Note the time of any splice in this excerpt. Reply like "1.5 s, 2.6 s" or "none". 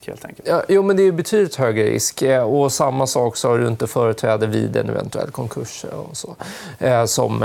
none